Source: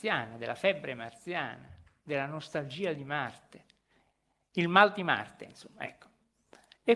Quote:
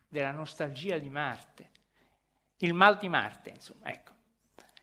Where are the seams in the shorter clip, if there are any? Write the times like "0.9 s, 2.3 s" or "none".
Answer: none